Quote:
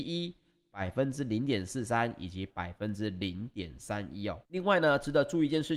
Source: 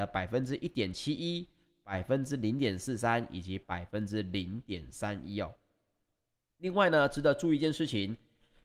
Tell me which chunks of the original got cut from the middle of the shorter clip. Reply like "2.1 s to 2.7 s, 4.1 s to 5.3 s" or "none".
5.6 s to 6.5 s

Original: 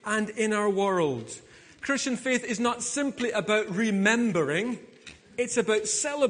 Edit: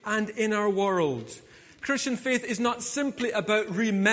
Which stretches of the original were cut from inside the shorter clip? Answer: none

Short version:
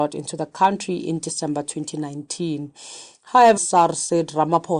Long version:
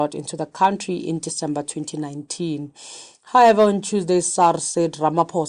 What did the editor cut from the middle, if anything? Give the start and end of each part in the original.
3.6 s to 4.2 s

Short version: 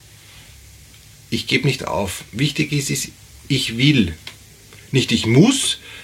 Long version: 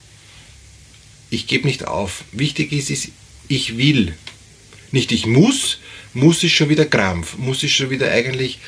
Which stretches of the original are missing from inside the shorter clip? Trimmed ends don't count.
none

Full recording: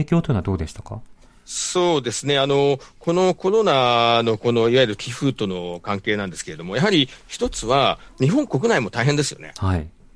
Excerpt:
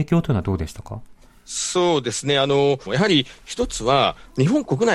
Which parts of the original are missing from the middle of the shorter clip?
2.9 s to 6.7 s

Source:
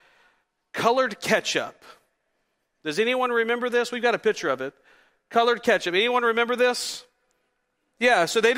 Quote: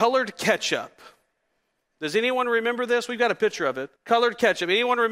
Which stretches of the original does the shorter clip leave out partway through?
4.8 s to 5.2 s

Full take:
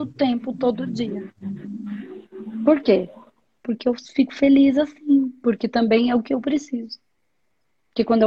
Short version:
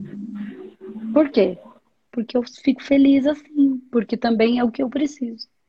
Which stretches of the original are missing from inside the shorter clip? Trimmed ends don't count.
none

